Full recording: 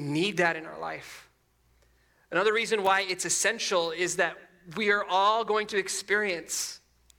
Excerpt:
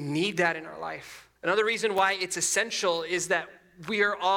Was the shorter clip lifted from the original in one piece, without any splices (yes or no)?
no